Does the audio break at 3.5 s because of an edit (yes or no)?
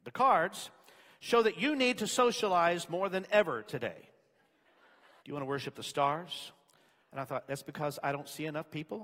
no